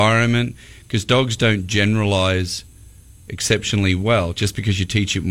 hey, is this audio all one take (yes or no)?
yes